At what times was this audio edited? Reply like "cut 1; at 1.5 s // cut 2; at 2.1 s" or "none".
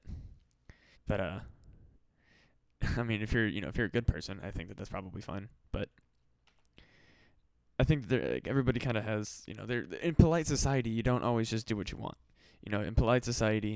cut 1; at 0.9 s // cut 2; at 10.0 s